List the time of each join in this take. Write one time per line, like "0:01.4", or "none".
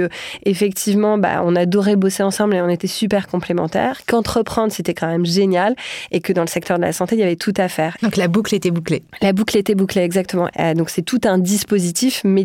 0:08.0
0:10.5

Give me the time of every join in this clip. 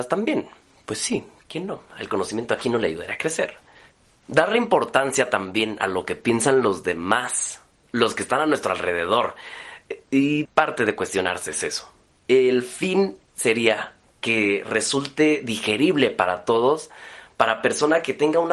0:10.4
0:12.1

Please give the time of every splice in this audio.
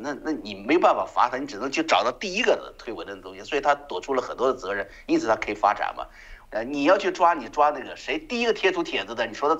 0:06.4

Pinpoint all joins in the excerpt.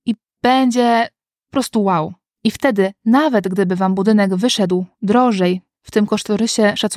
0:02.4

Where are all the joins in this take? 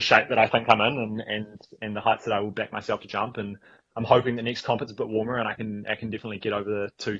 none

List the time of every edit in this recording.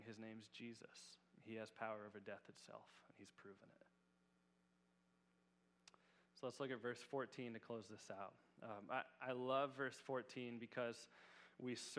none

